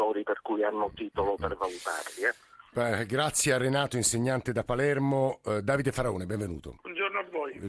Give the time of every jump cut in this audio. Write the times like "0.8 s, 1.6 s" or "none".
6.8 s